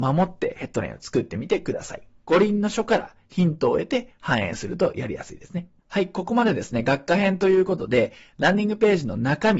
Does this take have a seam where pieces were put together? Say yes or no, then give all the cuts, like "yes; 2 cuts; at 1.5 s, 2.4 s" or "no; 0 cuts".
yes; 2 cuts; at 2.2 s, 5.8 s